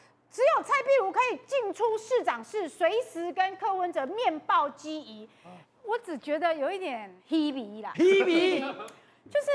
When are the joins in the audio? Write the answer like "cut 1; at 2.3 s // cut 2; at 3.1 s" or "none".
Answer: cut 1; at 5.6 s // cut 2; at 7.2 s